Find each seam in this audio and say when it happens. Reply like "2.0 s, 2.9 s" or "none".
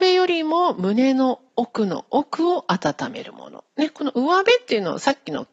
1.5 s

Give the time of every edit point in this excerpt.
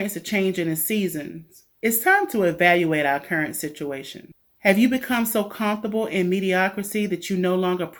1.8 s

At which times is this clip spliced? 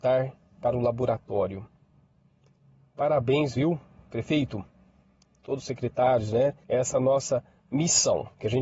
6.6 s

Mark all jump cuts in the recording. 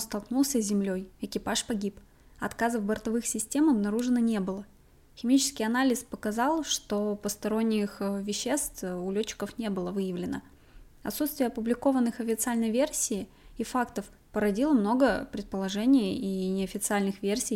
none

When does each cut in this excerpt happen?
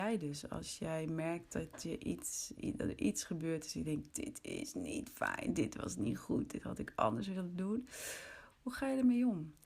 4.1 s

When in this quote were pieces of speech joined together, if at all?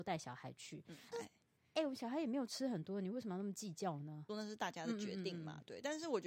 1.1 s, 4.3 s

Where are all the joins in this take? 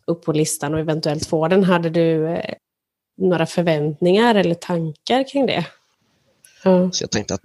6.4 s

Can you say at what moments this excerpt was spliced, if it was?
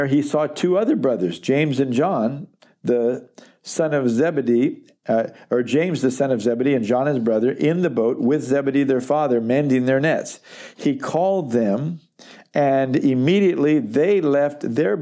none

